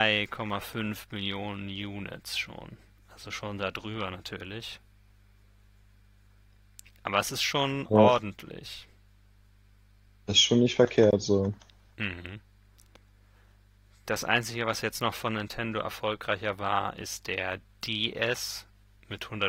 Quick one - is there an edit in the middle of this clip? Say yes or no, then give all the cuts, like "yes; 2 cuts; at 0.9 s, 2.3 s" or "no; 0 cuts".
no; 0 cuts